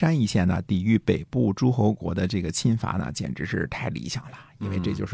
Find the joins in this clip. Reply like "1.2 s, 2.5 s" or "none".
none